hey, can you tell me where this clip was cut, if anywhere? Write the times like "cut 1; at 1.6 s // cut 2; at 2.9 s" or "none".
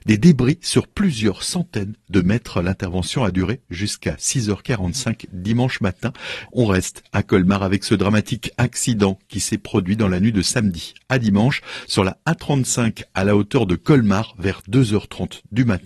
cut 1; at 6.5 s